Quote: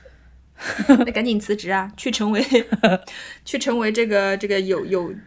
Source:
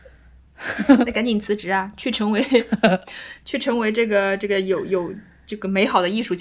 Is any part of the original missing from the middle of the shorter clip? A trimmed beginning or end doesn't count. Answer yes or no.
no